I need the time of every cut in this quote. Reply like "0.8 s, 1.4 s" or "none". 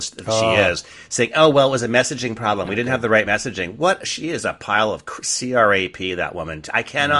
none